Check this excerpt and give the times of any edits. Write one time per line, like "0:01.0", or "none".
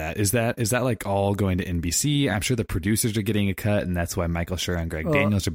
none